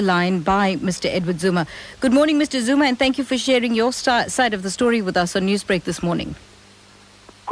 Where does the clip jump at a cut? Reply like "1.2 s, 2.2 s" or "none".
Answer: none